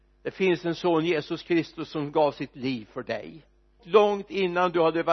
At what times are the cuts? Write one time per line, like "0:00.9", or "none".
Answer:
0:03.8